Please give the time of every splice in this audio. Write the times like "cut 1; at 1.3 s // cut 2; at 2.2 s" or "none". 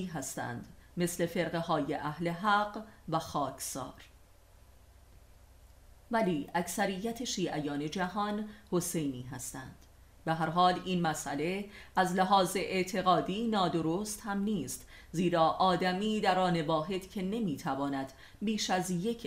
none